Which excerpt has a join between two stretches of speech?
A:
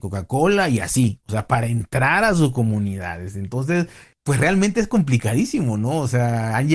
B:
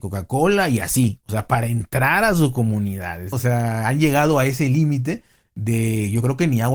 B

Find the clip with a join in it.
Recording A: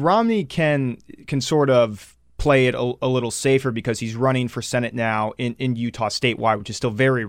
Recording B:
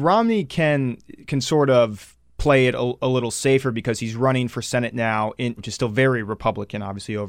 B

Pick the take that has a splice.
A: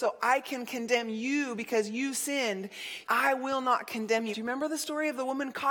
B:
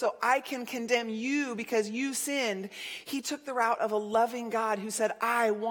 A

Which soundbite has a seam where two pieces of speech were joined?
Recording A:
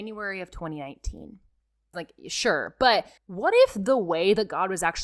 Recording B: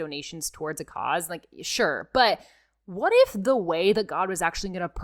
A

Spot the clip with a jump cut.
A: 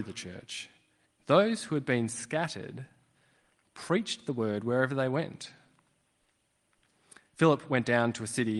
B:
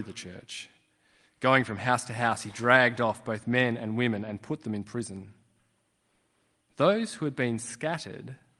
A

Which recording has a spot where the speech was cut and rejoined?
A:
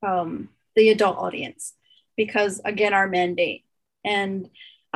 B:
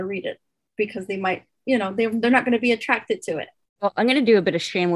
B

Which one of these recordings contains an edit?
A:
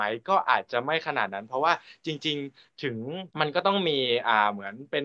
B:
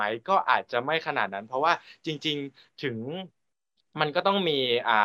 A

